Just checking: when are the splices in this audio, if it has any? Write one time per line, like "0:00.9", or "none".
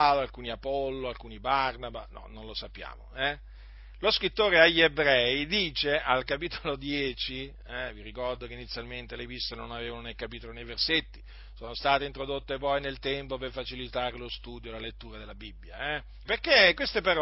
0:16.2